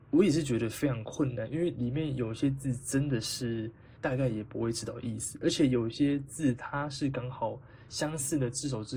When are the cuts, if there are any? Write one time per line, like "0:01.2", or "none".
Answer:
0:04.0